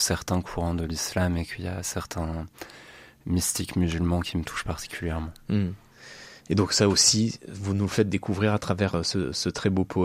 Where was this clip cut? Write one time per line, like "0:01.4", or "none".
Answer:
none